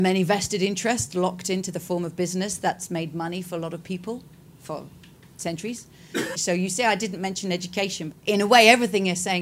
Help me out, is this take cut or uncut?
cut